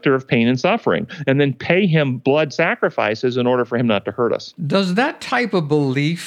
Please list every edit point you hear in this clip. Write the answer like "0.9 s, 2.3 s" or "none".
4.6 s